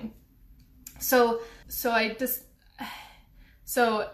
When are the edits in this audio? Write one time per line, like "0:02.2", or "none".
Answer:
0:01.6